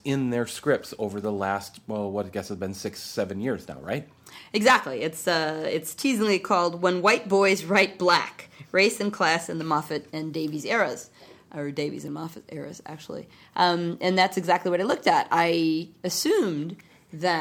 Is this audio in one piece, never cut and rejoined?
yes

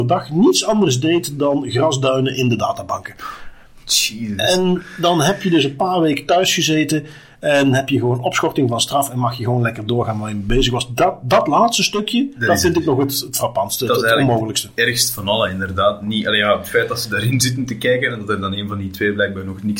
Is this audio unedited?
yes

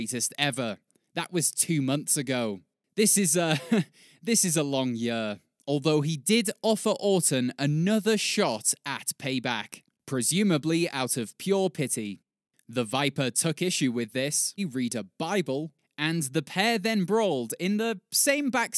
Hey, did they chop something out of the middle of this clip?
yes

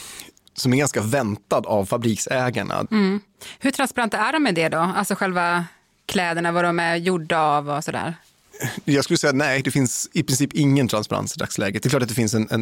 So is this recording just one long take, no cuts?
no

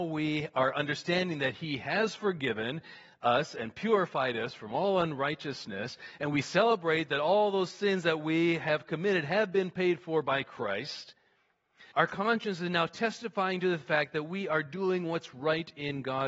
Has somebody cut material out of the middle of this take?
yes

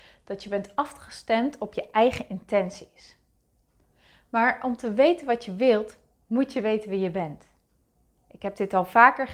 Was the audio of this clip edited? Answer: no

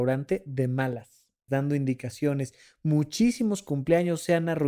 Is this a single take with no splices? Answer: no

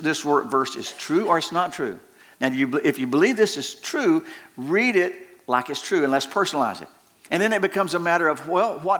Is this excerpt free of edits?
no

